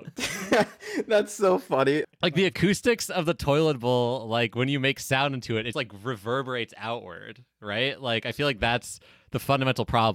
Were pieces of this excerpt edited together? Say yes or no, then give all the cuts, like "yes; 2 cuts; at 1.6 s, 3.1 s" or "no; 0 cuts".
yes; 2 cuts; at 2.0 s, 5.7 s